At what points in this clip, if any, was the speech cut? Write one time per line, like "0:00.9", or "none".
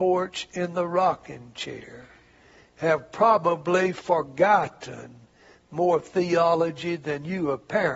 none